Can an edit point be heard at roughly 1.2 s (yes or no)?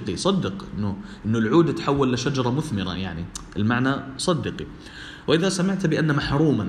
no